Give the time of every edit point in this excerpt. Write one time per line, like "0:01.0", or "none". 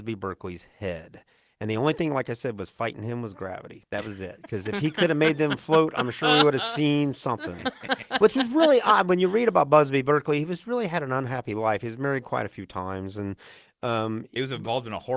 none